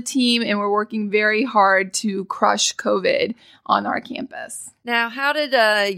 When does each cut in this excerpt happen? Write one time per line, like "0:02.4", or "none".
none